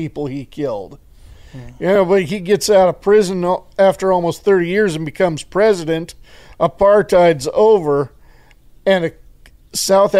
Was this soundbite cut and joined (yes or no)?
no